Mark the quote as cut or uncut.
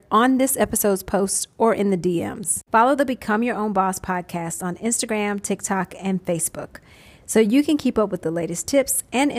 cut